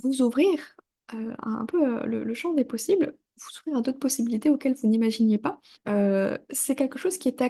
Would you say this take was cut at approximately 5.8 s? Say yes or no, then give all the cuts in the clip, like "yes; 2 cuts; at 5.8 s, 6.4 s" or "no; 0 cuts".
yes; 1 cut; at 5.8 s